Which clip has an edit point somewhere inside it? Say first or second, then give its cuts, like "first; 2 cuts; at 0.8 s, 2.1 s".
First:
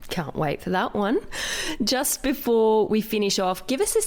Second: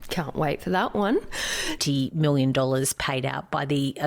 second; 1 cut; at 1.8 s